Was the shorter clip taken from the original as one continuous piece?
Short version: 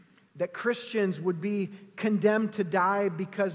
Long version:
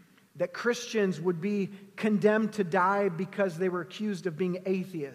yes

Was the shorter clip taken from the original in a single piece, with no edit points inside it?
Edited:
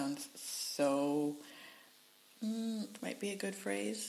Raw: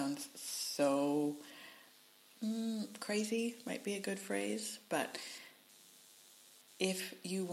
no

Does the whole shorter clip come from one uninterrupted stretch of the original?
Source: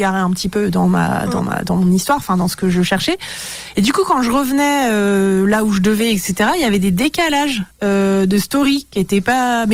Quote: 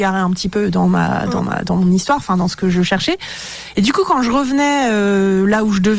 yes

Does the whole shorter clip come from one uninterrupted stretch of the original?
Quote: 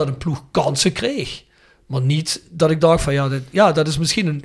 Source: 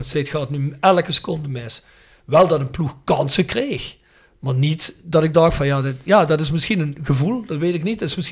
yes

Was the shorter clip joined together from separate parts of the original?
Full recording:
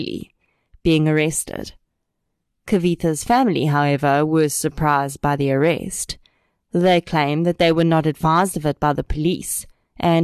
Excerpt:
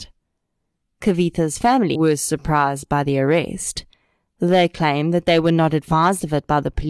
yes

